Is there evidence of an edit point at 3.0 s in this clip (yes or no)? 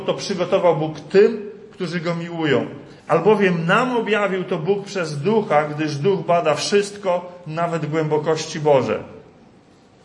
yes